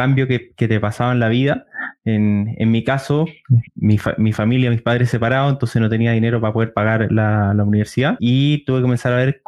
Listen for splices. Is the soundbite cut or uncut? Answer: cut